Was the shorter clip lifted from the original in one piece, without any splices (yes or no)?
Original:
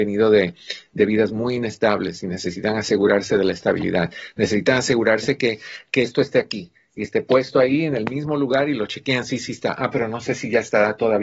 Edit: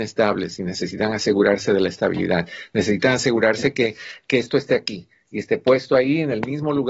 yes